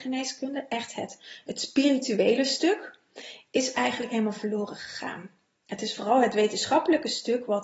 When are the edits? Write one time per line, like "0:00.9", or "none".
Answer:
none